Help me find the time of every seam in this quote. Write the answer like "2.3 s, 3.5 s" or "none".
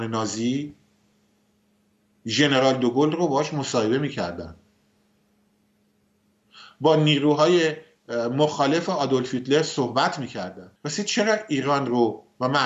10.8 s